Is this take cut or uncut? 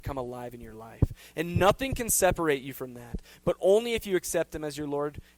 uncut